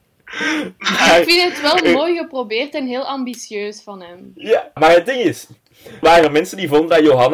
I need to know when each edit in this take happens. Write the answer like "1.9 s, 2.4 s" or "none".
4.8 s, 6.0 s